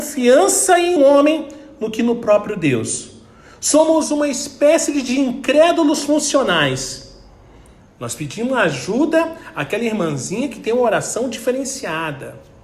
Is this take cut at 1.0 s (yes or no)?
yes